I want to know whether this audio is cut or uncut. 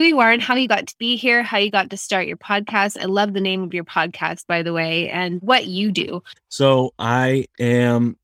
cut